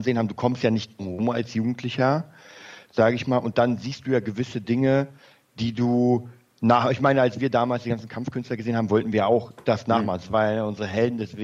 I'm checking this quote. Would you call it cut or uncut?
uncut